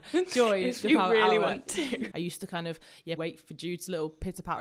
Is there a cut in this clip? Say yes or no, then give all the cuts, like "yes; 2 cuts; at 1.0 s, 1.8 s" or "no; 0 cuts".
yes; 2 cuts; at 2.1 s, 3.2 s